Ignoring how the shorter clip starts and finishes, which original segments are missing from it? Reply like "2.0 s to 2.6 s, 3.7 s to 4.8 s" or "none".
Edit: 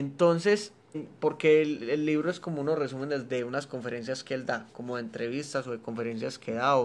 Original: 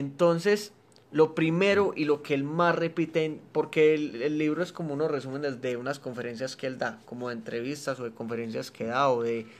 0.9 s to 3.3 s